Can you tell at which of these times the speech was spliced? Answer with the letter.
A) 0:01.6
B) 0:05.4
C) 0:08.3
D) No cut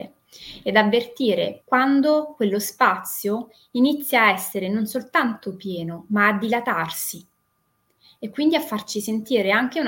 A